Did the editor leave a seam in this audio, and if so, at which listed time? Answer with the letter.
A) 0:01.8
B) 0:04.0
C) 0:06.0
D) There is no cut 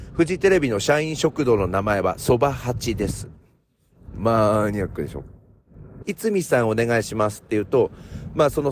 C